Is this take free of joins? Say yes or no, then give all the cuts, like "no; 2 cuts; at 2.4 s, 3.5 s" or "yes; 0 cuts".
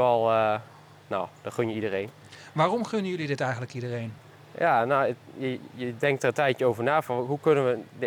yes; 0 cuts